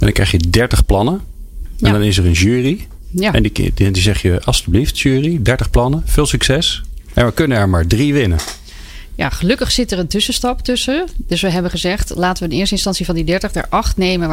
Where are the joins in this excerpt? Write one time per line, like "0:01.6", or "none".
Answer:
none